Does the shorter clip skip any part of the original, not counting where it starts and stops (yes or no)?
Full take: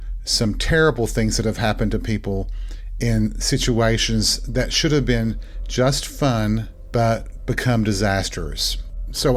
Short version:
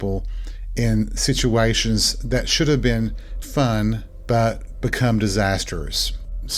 yes